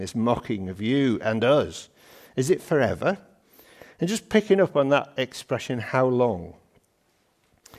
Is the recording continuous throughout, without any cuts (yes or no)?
yes